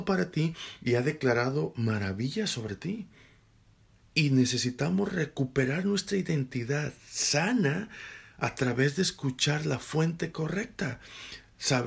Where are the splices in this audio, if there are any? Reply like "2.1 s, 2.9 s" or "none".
none